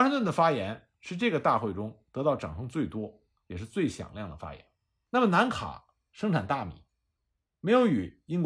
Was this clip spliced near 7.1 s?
no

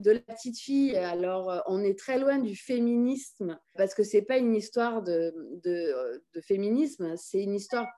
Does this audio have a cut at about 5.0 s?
no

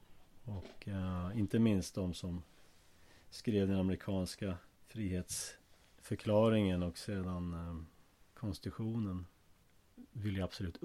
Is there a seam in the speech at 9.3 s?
no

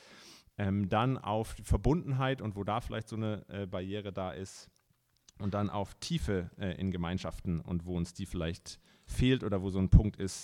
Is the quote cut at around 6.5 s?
no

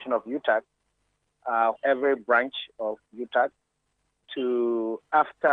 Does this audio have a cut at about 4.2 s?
no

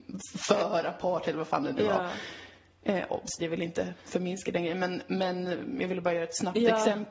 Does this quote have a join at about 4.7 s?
no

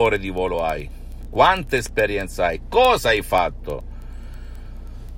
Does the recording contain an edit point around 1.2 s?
no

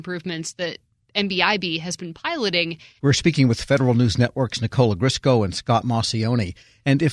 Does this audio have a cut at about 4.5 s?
no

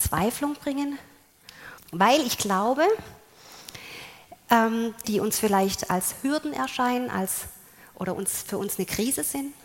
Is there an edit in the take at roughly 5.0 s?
yes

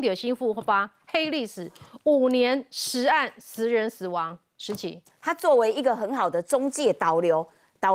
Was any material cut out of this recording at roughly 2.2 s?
no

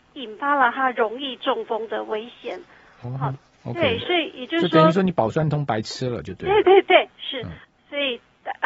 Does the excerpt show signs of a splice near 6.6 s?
no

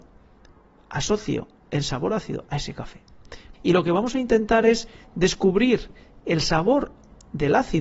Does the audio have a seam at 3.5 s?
yes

